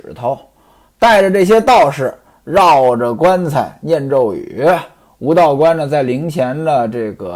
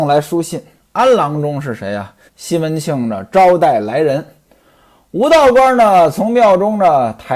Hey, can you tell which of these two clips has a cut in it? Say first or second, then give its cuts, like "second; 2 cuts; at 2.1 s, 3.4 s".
second; 1 cut; at 2.3 s